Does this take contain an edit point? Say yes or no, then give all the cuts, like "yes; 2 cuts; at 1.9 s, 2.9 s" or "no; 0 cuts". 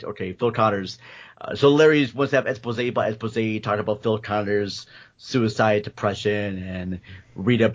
no; 0 cuts